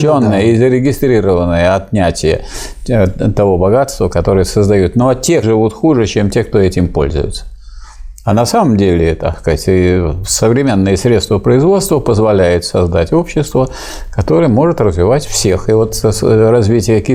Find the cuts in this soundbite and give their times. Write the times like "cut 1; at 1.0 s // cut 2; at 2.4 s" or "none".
cut 1; at 5.4 s